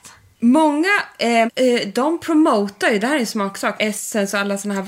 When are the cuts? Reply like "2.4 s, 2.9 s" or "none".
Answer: 1.5 s, 3.8 s